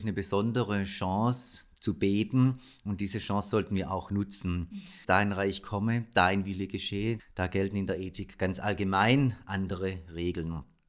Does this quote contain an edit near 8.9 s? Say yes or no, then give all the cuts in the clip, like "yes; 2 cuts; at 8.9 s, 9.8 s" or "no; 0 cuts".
no; 2 cuts; at 5.0 s, 7.2 s